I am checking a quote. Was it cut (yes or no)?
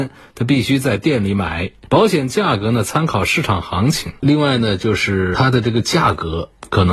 yes